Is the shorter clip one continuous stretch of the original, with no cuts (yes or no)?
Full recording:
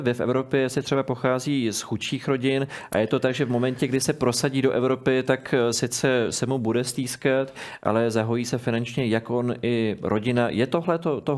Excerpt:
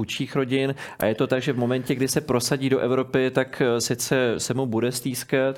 yes